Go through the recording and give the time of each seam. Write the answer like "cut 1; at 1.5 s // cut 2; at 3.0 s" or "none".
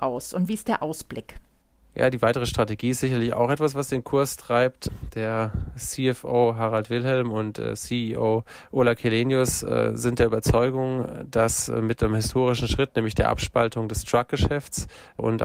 none